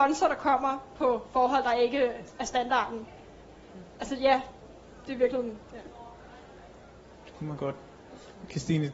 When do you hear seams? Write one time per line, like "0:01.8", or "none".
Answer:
none